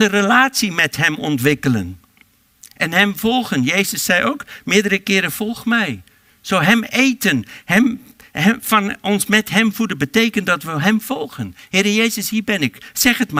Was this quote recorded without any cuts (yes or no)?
yes